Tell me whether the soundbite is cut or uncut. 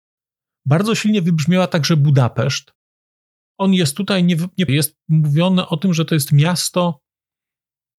cut